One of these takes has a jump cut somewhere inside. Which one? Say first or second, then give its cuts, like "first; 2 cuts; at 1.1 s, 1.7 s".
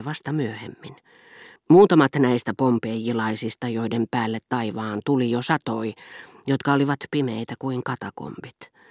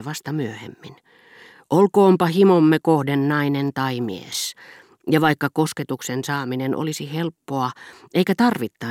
first; 2 cuts; at 1.6 s, 6.4 s